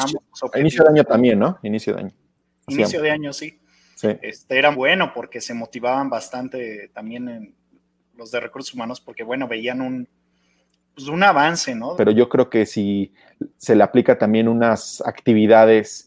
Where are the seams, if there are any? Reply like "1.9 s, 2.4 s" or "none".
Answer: 4.7 s, 11.9 s